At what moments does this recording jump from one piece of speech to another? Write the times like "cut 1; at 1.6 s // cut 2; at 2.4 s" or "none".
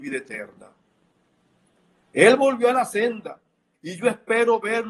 cut 1; at 3.7 s